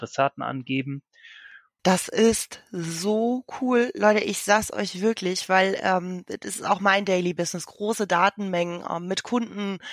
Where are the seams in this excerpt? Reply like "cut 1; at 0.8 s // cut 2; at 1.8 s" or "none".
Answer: cut 1; at 1.8 s